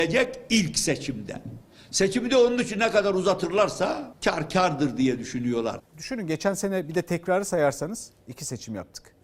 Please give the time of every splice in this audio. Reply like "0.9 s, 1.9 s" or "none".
5.8 s